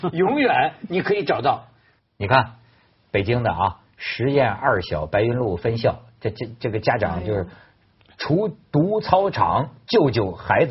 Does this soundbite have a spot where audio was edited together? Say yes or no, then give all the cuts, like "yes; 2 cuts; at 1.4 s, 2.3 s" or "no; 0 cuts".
yes; 1 cut; at 2.0 s